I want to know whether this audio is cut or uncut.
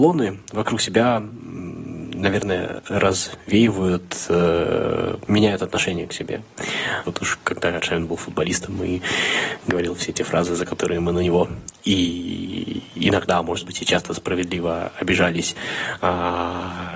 cut